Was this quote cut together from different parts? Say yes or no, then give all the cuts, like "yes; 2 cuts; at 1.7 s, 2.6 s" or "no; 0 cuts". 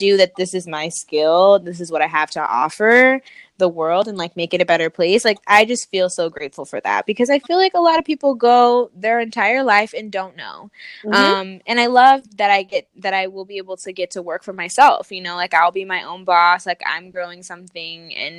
no; 0 cuts